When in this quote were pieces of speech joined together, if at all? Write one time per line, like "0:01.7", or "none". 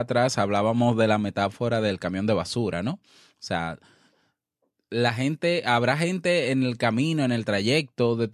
none